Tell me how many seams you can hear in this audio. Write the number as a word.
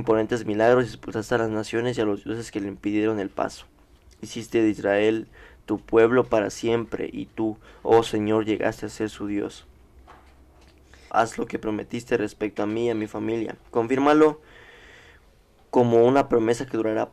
two